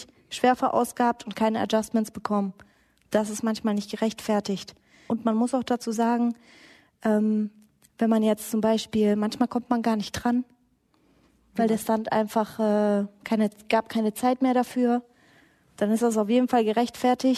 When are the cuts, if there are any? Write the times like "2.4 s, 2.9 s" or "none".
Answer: 5.1 s